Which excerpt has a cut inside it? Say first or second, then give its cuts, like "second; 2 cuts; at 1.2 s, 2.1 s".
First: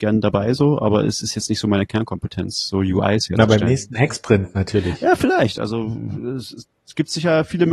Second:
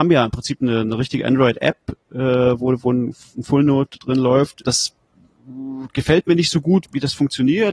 second; 2 cuts; at 4.6 s, 6.8 s